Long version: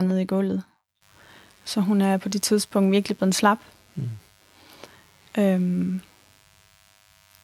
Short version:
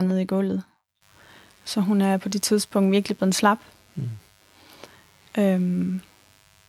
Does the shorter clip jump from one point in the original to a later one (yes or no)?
no